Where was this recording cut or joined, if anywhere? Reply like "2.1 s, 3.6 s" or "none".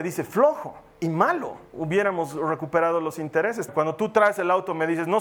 1.7 s, 3.7 s